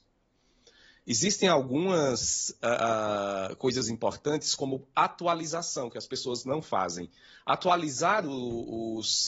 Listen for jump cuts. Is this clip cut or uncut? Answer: uncut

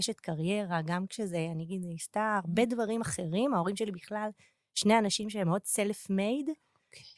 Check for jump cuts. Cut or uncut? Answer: uncut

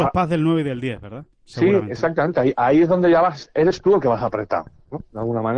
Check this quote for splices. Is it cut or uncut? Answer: uncut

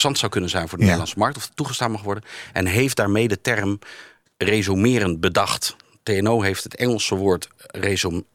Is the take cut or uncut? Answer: uncut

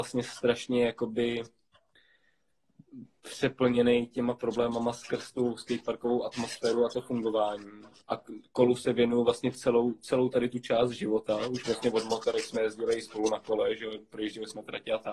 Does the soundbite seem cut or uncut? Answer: uncut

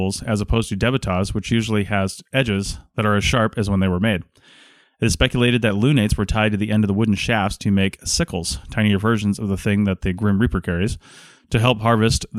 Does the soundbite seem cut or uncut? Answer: uncut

